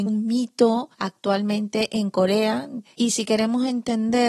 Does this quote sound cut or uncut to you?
cut